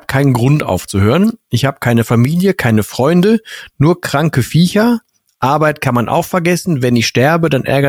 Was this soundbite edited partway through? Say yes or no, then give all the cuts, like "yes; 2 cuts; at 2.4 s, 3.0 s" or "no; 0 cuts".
no; 0 cuts